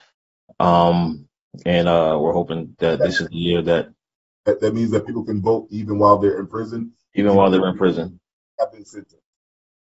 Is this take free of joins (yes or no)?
yes